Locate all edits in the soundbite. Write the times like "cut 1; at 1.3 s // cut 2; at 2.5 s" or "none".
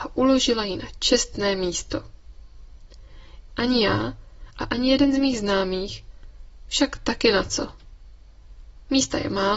cut 1; at 3.5 s